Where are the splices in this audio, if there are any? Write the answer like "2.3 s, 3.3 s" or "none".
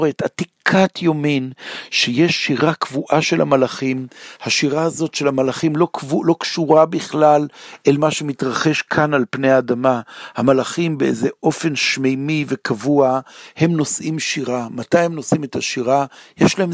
none